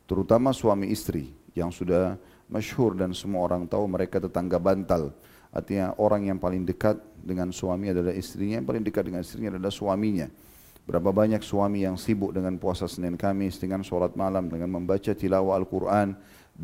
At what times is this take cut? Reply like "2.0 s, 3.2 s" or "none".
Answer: 10.8 s, 14.5 s